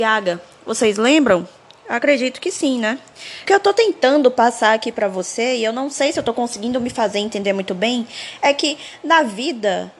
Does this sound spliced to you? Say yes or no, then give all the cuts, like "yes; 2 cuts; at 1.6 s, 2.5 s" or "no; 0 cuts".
yes; 1 cut; at 3.5 s